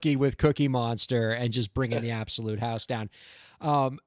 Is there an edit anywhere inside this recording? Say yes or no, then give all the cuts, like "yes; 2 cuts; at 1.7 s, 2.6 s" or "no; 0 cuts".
no; 0 cuts